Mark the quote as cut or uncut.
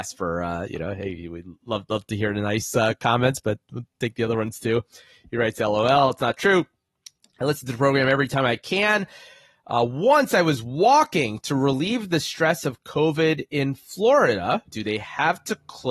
cut